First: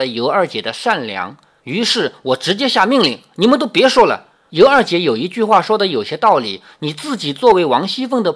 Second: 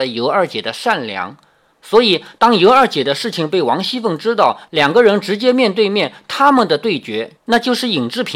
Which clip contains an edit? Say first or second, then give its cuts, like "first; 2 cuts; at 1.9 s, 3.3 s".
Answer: first; 2 cuts; at 1.6 s, 4.5 s